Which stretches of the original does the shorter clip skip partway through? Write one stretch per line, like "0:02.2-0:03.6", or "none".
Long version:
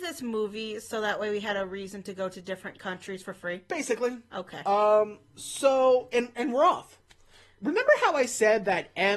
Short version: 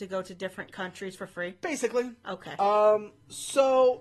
none